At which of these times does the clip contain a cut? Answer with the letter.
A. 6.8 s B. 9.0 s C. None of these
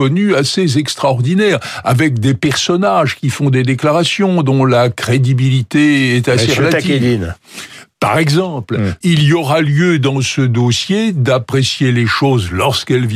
B